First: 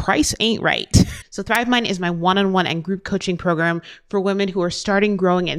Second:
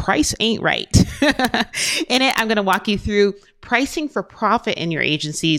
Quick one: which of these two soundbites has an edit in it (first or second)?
first